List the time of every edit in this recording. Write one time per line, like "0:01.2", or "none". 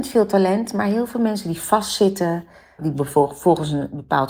0:02.8